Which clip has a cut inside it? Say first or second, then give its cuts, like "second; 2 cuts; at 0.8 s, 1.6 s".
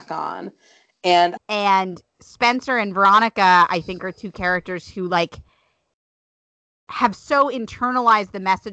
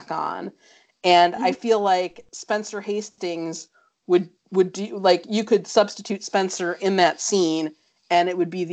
first; 1 cut; at 1.4 s